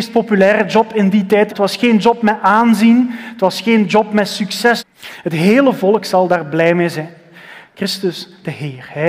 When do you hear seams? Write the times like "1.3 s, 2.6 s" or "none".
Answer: 1.5 s, 4.8 s, 7.6 s